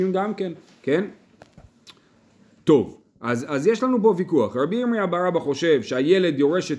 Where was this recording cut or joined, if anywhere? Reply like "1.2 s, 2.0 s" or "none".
none